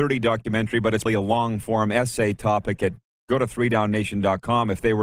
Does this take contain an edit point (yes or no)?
yes